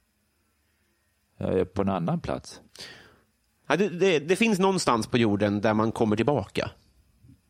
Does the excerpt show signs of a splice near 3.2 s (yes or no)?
no